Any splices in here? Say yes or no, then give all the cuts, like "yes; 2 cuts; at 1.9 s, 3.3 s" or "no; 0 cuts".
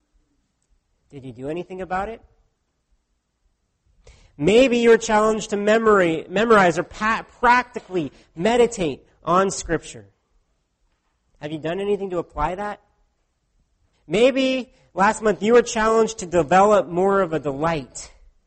yes; 1 cut; at 13.9 s